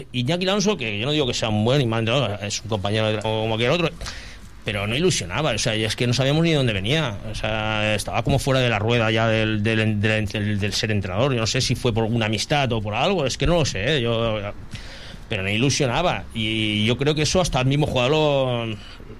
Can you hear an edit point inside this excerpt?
yes; 1 cut; at 3.2 s

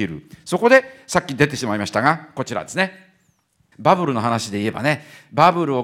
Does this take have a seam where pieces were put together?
yes; 1 cut; at 3.7 s

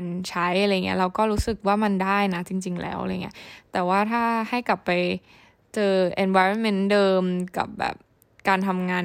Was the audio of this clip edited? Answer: no; 0 cuts

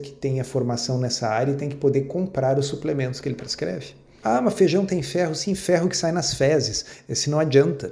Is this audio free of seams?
no; 1 cut; at 4.2 s

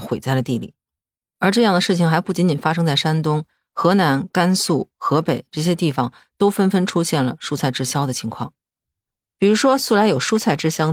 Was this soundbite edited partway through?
no; 0 cuts

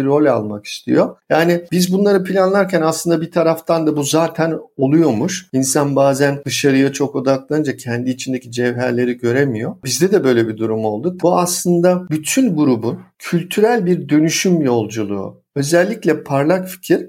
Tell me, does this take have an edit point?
yes; 1 cut; at 11.2 s

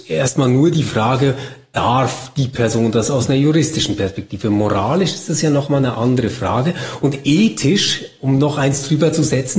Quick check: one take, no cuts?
yes; 0 cuts

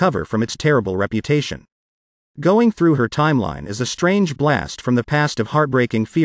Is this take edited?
no; 0 cuts

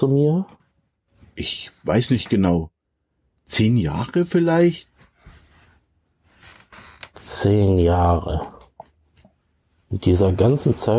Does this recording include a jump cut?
no; 0 cuts

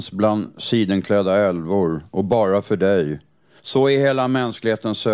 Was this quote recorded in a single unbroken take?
no; 1 cut; at 3.6 s

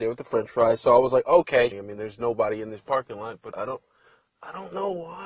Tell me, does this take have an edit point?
yes; 2 cuts; at 1.7 s, 3.5 s

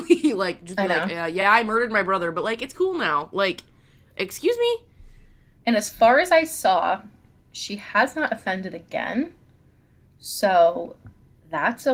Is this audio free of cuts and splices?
yes; 0 cuts

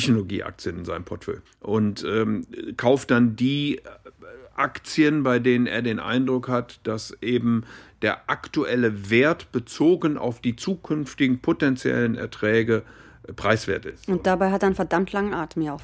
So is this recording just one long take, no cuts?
no; 1 cut; at 1.5 s

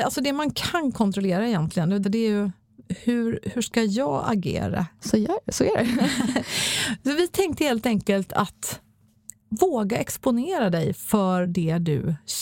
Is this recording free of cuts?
no; 2 cuts; at 2.0 s, 5.0 s

